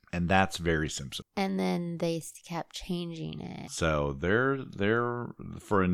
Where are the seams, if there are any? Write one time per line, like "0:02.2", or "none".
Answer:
0:01.2
0:03.7